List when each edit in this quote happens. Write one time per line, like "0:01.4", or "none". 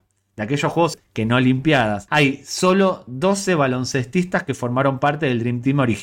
0:00.9
0:02.1